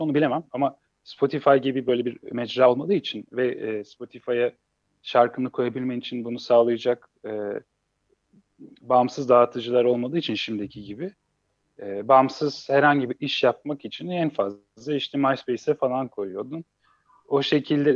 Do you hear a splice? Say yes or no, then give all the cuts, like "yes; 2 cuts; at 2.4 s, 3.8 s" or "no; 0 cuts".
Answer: no; 0 cuts